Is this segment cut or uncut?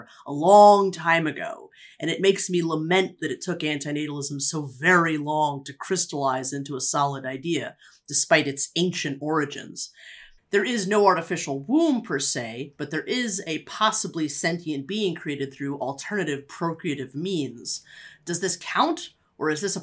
cut